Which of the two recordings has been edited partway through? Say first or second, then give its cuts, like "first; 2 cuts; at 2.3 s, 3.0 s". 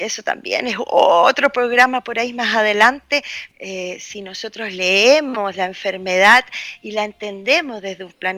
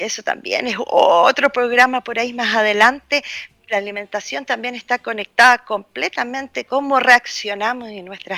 first; 1 cut; at 3.5 s